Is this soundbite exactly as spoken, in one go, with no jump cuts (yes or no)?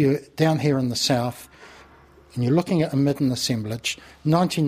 yes